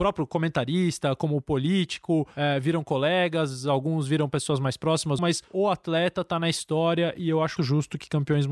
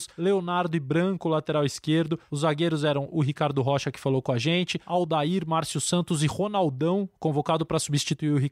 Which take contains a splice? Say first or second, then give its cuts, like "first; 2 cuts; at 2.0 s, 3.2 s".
first; 2 cuts; at 5.2 s, 7.6 s